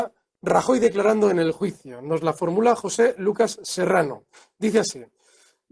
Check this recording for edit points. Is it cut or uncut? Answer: uncut